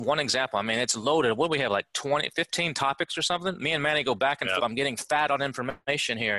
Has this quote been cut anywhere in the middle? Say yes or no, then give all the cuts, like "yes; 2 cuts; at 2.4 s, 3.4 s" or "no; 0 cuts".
yes; 1 cut; at 4.6 s